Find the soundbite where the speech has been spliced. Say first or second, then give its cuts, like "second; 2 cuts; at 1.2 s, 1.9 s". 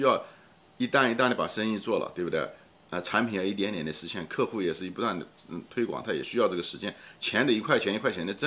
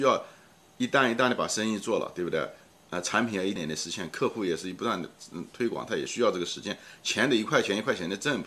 second; 1 cut; at 3.6 s